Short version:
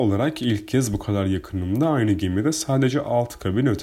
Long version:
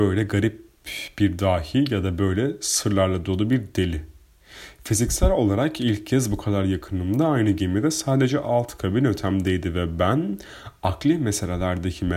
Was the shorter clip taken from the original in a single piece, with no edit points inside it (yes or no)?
yes